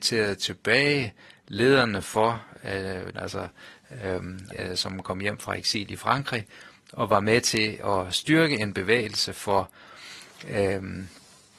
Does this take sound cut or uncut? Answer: cut